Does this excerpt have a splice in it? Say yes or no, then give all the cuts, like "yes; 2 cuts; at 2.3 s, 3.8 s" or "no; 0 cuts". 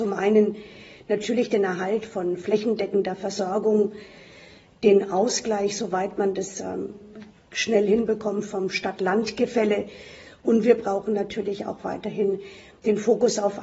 no; 0 cuts